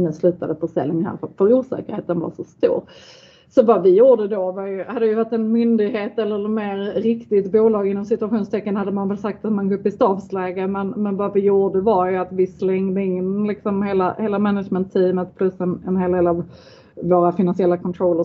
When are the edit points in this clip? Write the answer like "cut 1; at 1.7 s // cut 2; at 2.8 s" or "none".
none